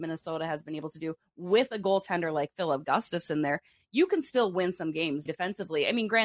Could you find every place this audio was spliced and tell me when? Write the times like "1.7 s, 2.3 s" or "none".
5.3 s